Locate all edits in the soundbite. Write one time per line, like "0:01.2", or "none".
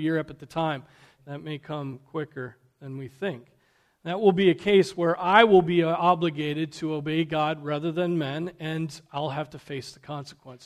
0:01.2